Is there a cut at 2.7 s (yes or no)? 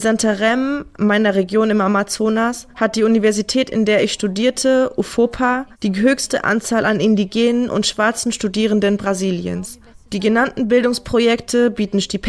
no